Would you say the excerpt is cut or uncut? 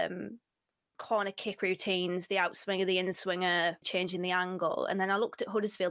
cut